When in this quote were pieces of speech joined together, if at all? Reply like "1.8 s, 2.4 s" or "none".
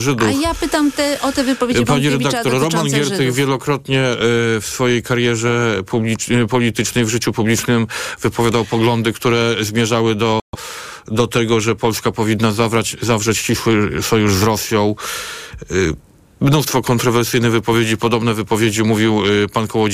none